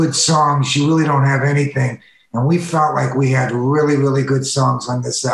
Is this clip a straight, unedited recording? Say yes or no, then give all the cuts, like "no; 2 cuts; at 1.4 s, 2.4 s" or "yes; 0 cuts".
yes; 0 cuts